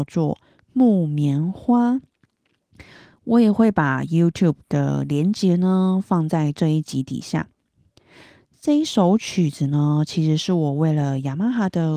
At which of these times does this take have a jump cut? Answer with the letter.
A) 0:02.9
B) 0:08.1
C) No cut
C